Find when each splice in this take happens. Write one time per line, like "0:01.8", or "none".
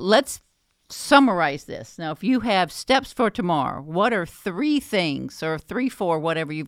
none